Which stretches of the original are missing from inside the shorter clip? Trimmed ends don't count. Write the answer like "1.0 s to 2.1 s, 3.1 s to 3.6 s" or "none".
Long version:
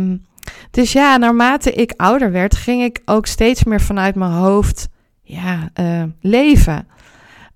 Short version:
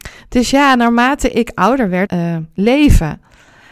2.5 s to 5.7 s